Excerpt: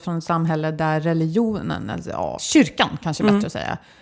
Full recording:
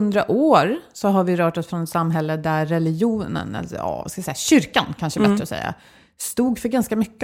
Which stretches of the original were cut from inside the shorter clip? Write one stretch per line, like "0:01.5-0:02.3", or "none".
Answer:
0:04.0-0:04.3